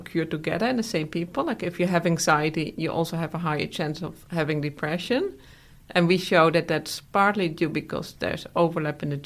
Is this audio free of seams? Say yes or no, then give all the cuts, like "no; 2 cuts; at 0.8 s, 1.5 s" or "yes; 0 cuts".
yes; 0 cuts